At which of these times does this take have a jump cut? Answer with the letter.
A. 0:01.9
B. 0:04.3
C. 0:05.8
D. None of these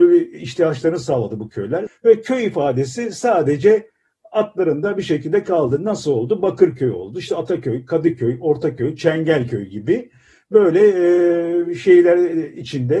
A